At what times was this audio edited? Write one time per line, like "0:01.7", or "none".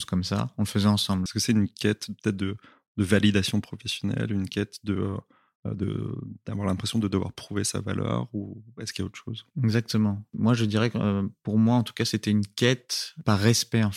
0:01.3